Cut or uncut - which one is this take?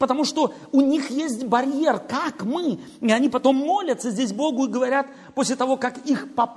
uncut